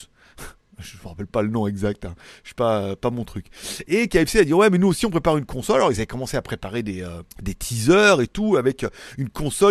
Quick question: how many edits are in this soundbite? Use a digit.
1